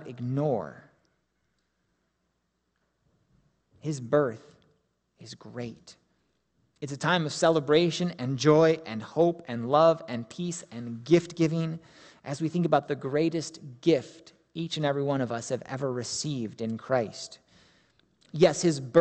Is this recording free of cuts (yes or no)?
yes